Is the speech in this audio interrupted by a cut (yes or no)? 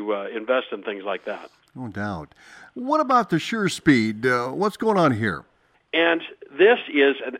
yes